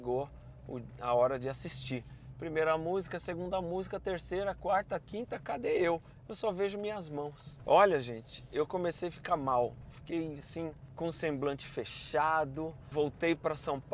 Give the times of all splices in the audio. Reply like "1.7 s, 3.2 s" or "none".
none